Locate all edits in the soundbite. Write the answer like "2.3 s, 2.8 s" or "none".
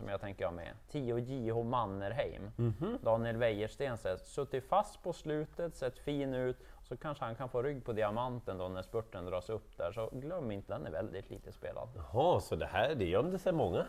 10.7 s